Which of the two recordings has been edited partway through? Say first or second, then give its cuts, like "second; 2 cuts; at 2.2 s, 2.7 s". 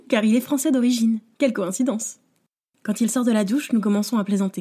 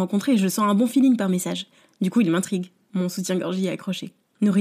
second; 1 cut; at 2.9 s